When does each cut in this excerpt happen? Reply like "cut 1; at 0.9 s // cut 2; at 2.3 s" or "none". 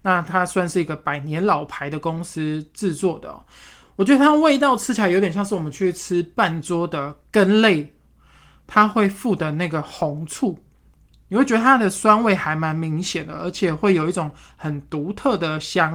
none